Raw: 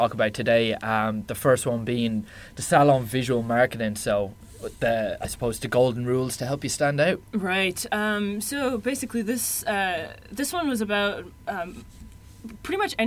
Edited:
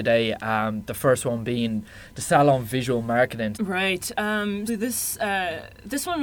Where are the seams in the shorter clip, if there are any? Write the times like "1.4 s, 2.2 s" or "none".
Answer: 3.5 s, 4.7 s